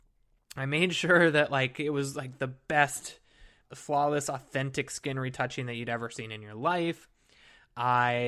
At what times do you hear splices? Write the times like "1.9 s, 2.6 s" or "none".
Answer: 3.6 s